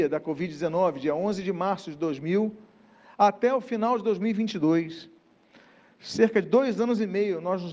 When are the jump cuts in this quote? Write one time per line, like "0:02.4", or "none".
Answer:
none